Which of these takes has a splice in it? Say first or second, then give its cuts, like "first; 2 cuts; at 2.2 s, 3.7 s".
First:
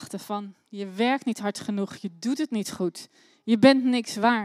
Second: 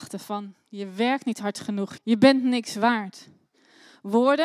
second; 1 cut; at 2.0 s